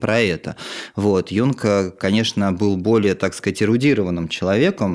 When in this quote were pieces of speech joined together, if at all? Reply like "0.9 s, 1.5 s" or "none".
none